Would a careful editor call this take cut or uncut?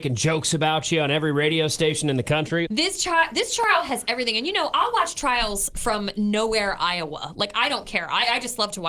cut